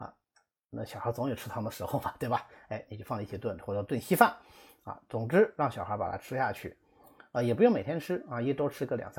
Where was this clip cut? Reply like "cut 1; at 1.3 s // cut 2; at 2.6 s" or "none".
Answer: none